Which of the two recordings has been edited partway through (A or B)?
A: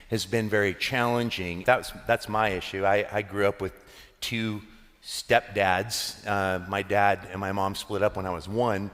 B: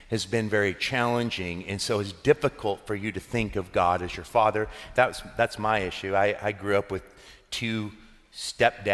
A